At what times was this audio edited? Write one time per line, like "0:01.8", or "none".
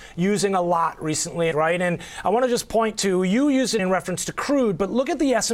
0:01.5
0:03.8